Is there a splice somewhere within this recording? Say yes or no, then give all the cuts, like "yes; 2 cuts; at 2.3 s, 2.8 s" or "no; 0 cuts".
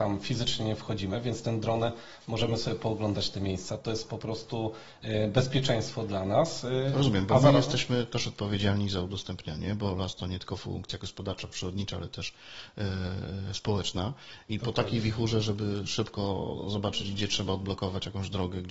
no; 0 cuts